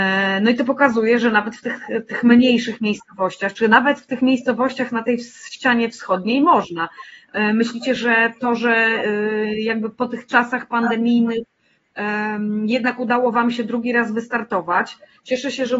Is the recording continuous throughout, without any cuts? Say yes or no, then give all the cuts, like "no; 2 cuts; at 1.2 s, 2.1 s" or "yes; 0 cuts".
yes; 0 cuts